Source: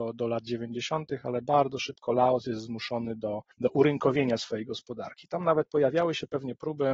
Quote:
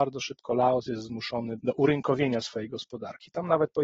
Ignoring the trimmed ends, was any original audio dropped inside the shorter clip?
yes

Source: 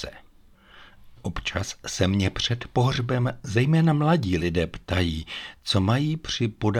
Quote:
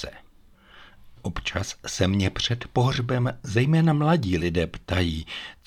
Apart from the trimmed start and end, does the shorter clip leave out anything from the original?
no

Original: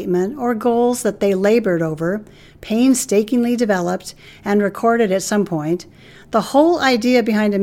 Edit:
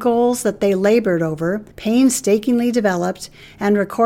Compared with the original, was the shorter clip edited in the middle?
yes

